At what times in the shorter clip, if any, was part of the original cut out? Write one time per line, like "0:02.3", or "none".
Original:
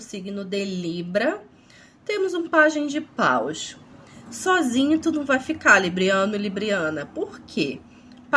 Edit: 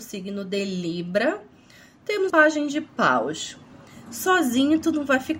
0:02.3